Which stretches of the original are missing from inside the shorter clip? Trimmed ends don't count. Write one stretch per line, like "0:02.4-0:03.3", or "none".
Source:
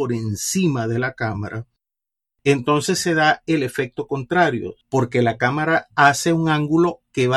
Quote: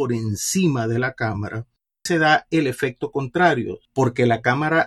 0:02.1-0:03.0